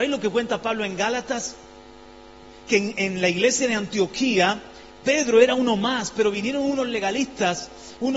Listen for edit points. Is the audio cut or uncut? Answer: uncut